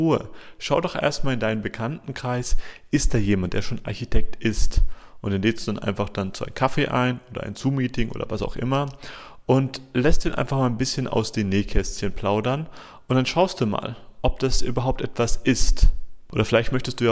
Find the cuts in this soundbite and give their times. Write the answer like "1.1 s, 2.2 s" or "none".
none